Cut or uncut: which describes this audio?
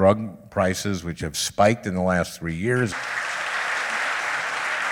cut